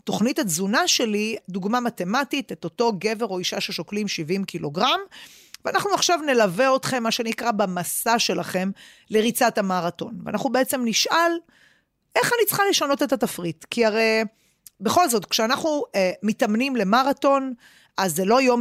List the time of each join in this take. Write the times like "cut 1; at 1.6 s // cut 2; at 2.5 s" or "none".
cut 1; at 1.4 s